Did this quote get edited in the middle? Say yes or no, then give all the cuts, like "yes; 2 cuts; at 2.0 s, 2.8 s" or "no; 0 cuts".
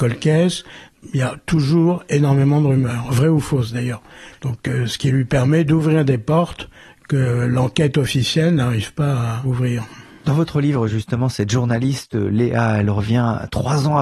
yes; 1 cut; at 4.3 s